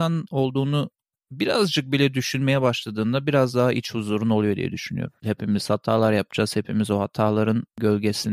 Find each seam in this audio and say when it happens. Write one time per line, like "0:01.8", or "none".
0:05.2